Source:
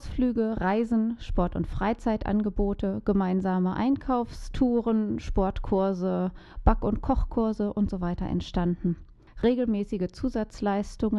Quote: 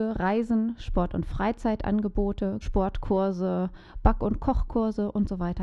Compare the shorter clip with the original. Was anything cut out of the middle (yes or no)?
yes